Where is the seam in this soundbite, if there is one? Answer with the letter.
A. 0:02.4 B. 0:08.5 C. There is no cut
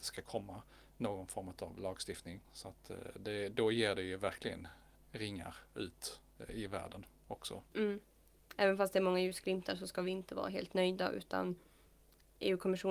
A